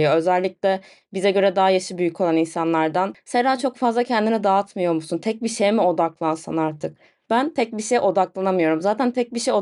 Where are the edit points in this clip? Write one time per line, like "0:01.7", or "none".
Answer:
none